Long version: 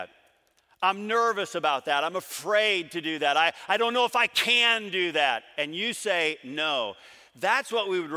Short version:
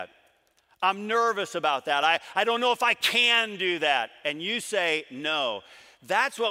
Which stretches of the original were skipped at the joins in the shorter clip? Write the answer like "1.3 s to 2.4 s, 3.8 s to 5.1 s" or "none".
2.0 s to 3.3 s